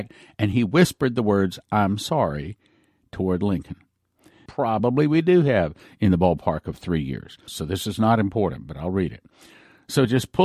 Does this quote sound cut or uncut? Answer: cut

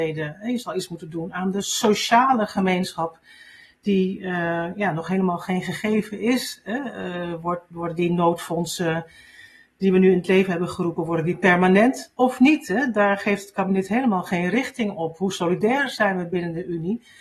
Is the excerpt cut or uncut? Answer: uncut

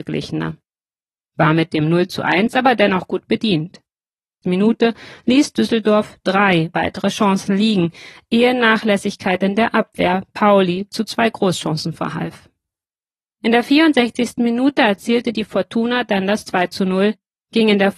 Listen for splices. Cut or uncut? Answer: cut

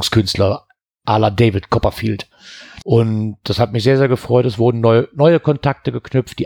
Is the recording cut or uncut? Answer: cut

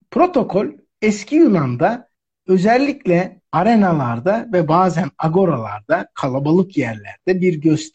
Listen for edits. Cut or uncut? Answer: cut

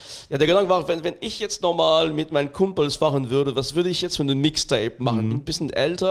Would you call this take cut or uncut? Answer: uncut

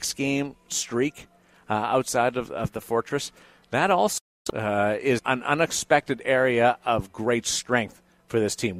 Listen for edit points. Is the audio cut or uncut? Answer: cut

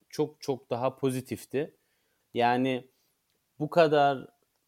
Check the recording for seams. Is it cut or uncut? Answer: cut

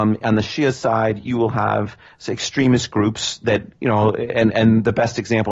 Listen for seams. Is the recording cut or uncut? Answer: uncut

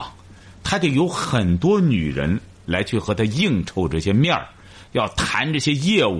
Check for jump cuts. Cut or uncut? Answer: uncut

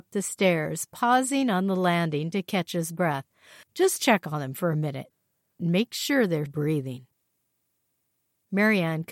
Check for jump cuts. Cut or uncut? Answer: cut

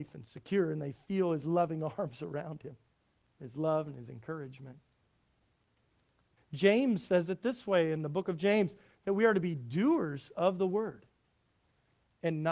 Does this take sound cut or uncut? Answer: cut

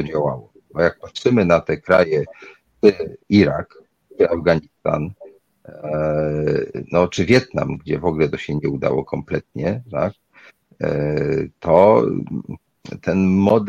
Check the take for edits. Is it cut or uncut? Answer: uncut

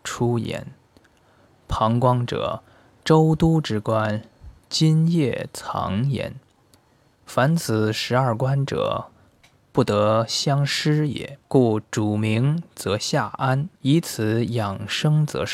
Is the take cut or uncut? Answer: cut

